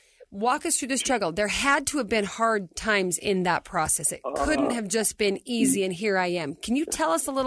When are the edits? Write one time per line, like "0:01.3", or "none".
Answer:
none

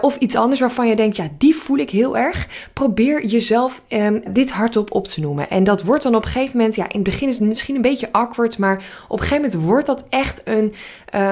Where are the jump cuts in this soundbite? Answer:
0:04.3

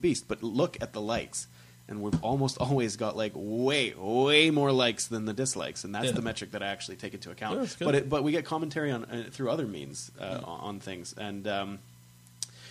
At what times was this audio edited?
none

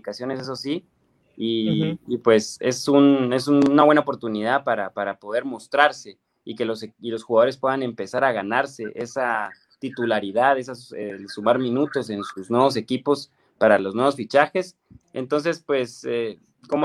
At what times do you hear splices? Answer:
0:15.0

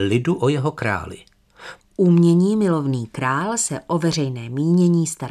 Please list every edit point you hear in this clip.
0:01.8

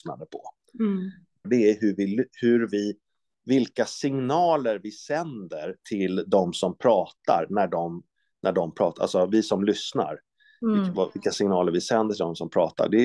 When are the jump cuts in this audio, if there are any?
0:01.4

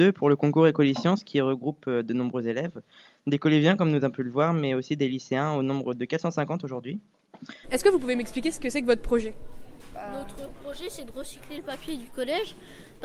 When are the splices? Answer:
0:07.6

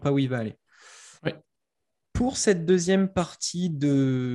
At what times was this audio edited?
0:01.2

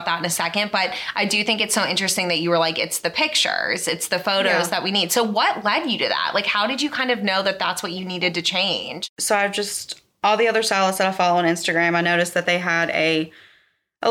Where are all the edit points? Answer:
none

